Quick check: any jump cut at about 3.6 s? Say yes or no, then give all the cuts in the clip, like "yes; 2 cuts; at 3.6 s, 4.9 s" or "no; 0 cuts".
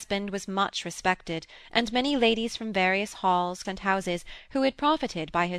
yes; 1 cut; at 3.6 s